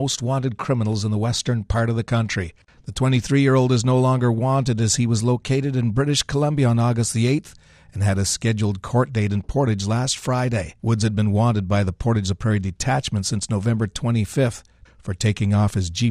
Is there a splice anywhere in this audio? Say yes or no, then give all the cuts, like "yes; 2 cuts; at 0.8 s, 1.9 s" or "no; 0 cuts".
yes; 2 cuts; at 10.8 s, 14.9 s